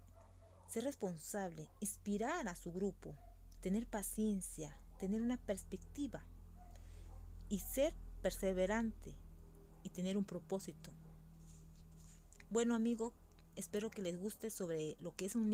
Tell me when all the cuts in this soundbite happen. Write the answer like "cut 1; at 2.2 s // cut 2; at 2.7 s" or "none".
cut 1; at 3.6 s